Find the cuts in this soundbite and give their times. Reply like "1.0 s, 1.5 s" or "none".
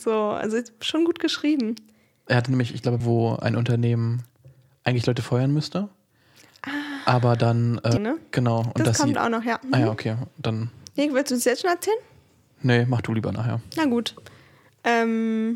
3.0 s, 8.0 s